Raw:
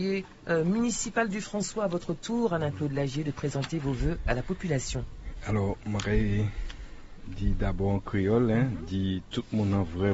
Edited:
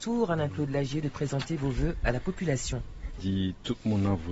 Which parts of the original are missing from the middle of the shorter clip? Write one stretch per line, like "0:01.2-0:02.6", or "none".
0:05.4-0:08.9